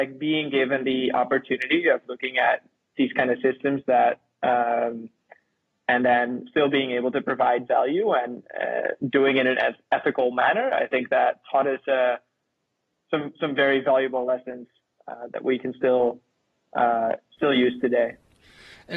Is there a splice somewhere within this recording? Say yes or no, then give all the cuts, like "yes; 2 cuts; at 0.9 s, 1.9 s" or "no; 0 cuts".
no; 0 cuts